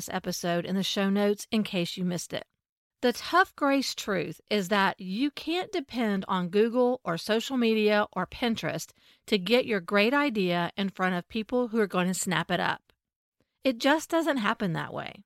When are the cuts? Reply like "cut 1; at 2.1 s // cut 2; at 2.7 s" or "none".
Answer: cut 1; at 2.9 s

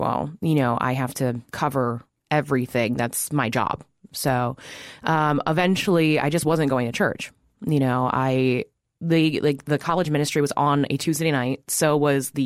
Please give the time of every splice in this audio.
cut 1; at 1.5 s

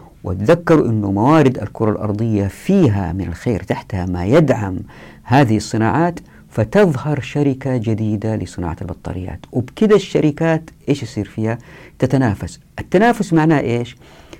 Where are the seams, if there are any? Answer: none

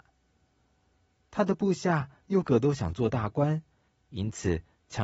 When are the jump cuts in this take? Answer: cut 1; at 2.4 s

